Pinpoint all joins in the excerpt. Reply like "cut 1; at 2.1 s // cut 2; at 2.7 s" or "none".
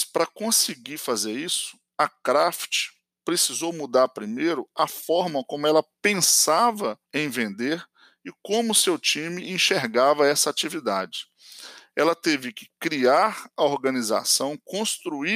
cut 1; at 7.0 s